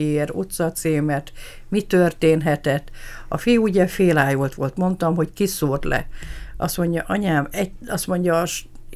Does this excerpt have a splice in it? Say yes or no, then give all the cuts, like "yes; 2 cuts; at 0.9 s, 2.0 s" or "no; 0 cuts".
no; 0 cuts